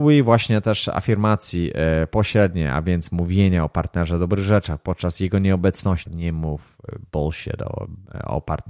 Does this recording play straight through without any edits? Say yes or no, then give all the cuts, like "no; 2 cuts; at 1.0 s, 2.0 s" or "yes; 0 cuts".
no; 1 cut; at 6.1 s